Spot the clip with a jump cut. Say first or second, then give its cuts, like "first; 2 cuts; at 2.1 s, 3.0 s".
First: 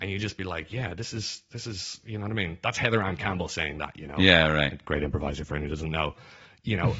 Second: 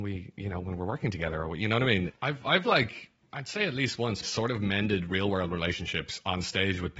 second; 2 cuts; at 2.1 s, 4.2 s